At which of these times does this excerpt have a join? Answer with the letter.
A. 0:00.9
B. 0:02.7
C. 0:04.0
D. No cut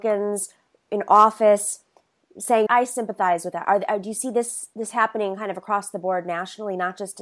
B